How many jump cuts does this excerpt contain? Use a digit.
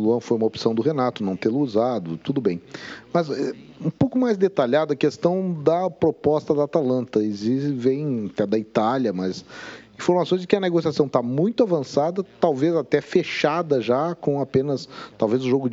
0